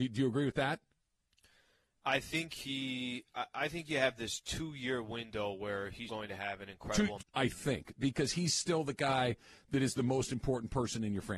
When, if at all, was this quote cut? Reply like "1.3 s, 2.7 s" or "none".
6.1 s, 7.2 s